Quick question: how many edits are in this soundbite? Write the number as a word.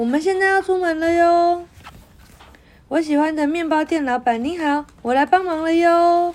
zero